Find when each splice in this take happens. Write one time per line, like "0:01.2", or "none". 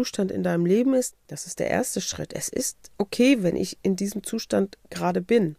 0:01.1